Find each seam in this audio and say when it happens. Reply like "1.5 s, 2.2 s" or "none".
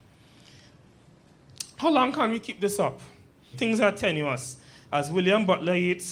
3.5 s